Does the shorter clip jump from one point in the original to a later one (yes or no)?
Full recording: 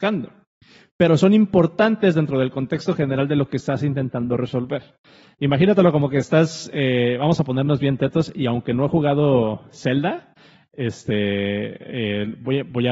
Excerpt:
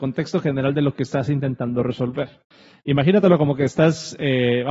no